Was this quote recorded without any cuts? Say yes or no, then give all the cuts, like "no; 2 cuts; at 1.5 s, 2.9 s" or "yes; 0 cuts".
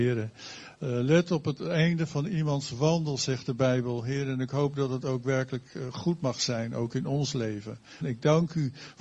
no; 1 cut; at 8.0 s